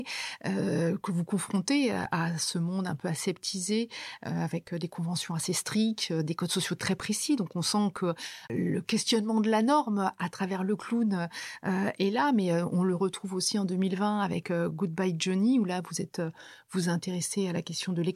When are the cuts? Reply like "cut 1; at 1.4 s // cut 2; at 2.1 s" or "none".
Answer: none